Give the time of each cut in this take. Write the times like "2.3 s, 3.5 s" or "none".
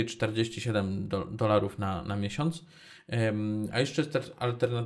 none